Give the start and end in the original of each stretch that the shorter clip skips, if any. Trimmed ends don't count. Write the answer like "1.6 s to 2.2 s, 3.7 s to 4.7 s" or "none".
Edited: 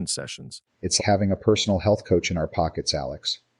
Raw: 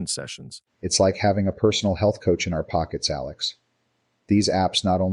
1.0 s to 1.1 s